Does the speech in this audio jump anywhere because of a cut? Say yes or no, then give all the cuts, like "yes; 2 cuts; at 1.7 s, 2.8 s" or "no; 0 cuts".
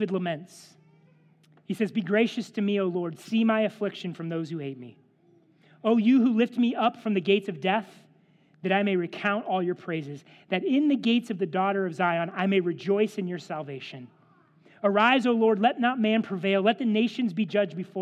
no; 0 cuts